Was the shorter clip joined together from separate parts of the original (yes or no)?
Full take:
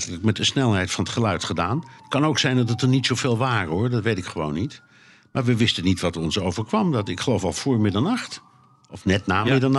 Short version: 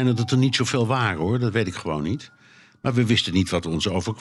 no